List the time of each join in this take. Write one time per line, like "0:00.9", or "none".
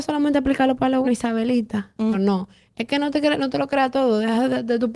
0:01.0
0:02.1